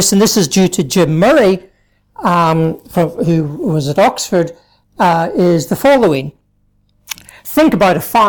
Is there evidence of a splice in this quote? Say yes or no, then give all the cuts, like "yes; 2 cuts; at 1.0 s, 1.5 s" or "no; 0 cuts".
no; 0 cuts